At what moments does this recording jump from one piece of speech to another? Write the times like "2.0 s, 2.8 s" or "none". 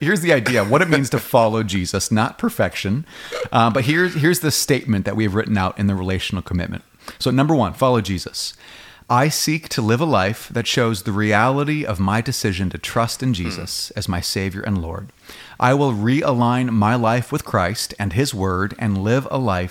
none